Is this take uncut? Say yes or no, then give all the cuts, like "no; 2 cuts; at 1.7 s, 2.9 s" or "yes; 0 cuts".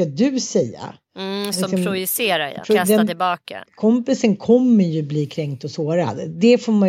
no; 2 cuts; at 2.6 s, 3.6 s